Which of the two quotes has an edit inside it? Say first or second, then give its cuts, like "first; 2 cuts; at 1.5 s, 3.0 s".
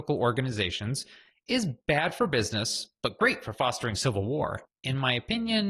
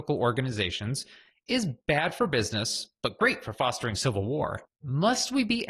first; 1 cut; at 4.7 s